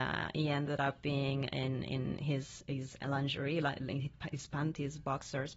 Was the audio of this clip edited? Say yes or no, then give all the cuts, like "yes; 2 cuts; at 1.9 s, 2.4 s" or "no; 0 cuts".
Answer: no; 0 cuts